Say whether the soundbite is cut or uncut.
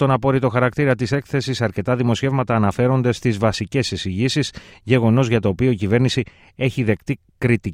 uncut